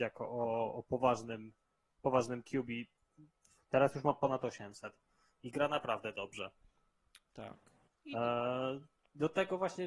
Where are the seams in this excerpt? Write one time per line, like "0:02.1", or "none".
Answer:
0:03.6